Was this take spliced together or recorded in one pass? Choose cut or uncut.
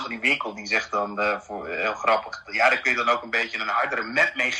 uncut